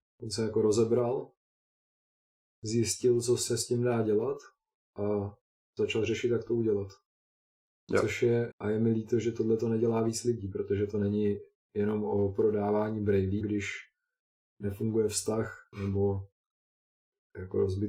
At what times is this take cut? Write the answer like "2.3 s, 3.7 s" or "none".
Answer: 8.5 s, 13.4 s, 15.7 s